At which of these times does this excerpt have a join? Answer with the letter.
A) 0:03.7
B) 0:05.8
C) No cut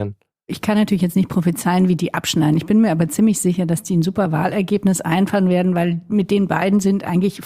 C